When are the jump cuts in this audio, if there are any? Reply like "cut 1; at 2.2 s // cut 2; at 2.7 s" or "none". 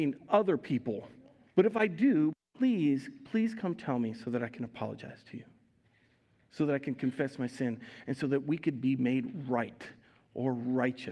cut 1; at 1.5 s